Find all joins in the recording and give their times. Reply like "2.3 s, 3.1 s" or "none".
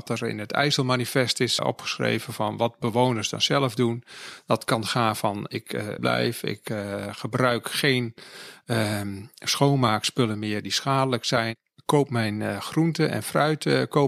1.6 s, 6.0 s